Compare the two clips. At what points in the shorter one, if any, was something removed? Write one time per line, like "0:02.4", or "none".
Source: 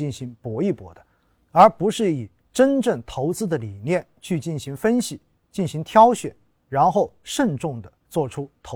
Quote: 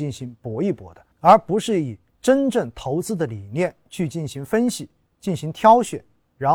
0:01.1